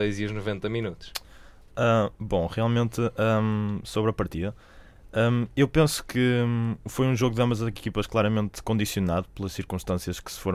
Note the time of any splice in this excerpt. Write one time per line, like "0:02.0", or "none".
none